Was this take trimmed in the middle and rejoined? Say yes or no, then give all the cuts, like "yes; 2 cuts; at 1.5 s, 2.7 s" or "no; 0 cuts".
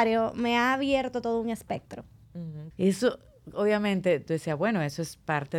yes; 2 cuts; at 2.7 s, 4.3 s